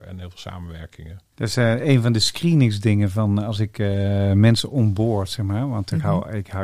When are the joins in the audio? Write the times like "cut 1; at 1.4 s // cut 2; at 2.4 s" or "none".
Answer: cut 1; at 1.3 s